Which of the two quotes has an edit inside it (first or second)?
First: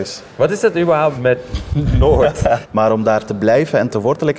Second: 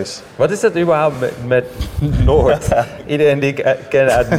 first